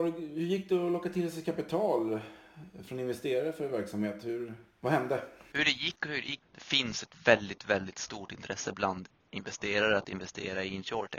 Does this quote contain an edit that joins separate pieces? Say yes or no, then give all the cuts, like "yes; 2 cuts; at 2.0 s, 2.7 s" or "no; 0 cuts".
yes; 1 cut; at 6.4 s